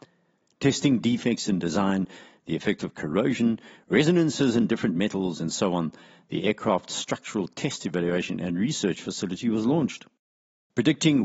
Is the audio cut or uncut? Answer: uncut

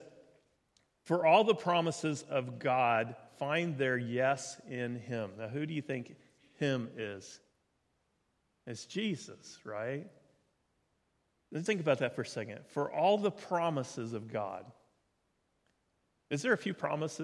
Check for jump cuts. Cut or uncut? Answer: cut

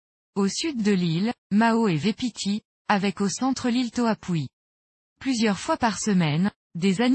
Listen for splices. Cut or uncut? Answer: cut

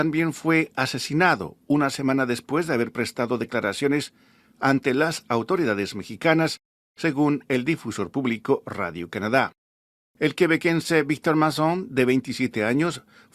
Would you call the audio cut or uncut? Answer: uncut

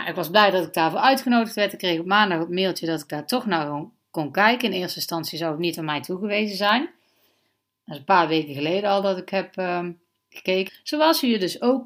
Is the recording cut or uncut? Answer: cut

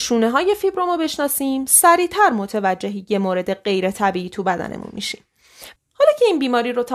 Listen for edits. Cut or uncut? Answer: cut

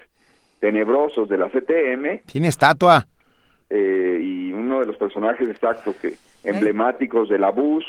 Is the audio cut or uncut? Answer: uncut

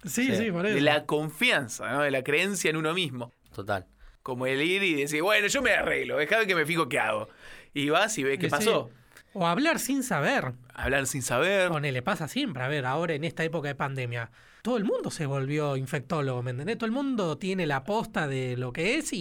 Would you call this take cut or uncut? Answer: cut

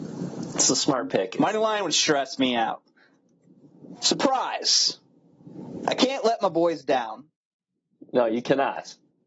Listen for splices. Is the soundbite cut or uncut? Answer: cut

